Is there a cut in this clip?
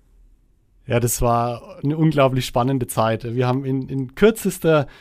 no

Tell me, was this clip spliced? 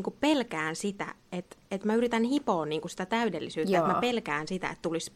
no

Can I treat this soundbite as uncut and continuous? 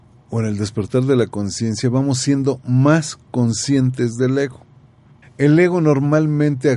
no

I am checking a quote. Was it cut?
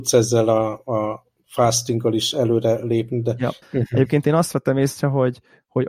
yes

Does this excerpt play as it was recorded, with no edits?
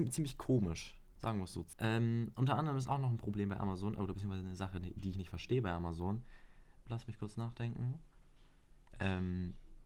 no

